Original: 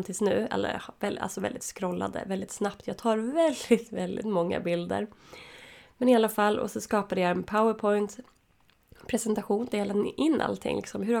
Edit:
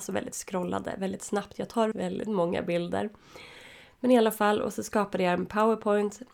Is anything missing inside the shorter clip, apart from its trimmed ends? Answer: yes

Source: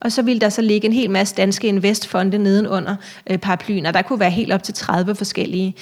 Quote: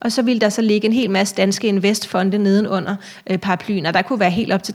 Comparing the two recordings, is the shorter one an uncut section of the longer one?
yes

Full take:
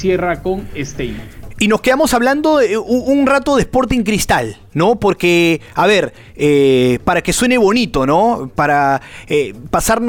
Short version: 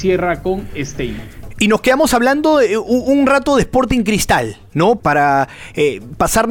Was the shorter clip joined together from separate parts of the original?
yes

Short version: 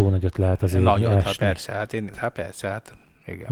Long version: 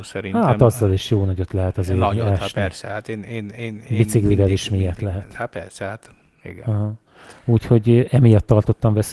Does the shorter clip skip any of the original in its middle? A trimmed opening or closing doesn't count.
yes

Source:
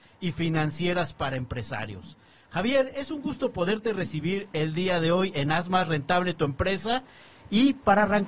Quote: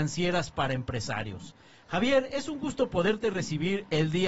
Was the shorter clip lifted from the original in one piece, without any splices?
yes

